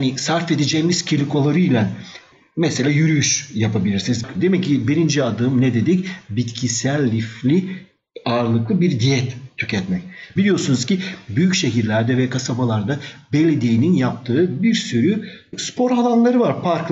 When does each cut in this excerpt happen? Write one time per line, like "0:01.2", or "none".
0:04.3
0:10.4